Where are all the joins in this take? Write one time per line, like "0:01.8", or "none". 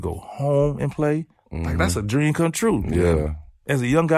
none